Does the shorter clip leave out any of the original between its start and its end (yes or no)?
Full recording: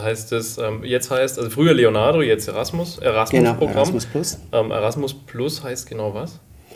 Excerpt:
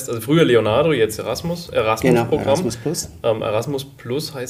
no